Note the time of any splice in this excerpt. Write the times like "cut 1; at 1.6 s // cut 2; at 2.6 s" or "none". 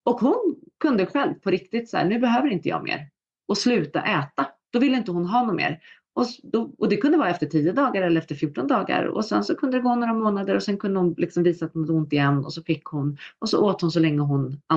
none